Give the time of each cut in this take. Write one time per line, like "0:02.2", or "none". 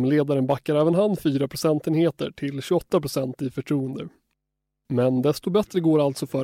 none